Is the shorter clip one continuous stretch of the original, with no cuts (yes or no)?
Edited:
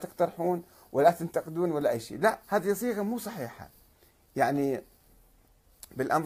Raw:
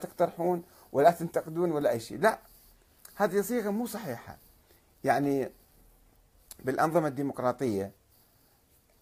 no